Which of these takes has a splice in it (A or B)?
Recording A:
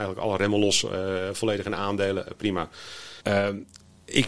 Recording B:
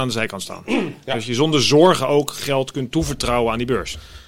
A